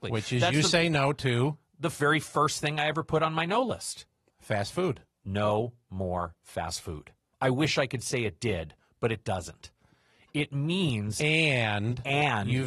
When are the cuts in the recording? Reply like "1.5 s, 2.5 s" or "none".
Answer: 7.3 s